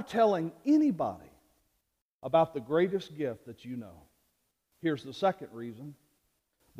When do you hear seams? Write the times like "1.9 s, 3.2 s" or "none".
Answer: none